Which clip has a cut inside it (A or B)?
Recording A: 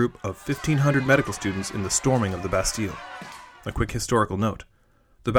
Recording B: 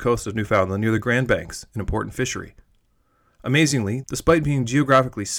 B